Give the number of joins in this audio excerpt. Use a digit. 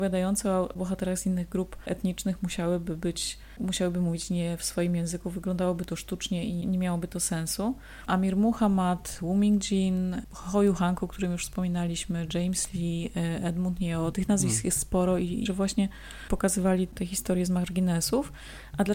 3